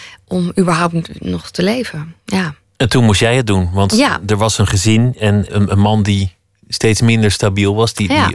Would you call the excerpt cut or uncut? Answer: cut